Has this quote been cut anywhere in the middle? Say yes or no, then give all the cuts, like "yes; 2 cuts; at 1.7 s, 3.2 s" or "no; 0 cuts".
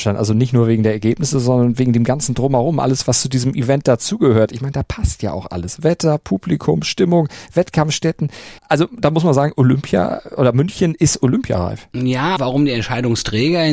yes; 2 cuts; at 8.6 s, 12.4 s